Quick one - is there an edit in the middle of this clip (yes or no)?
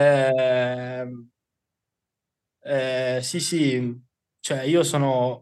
no